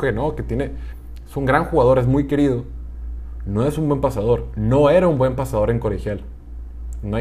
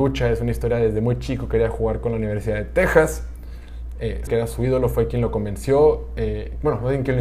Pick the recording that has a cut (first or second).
second